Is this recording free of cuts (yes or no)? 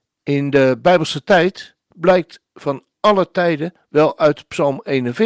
no